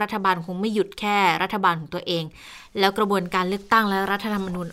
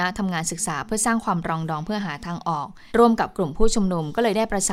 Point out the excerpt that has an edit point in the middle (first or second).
second